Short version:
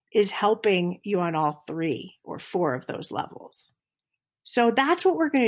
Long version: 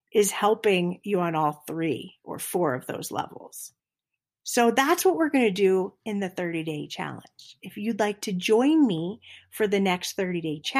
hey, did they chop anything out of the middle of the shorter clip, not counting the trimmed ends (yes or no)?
no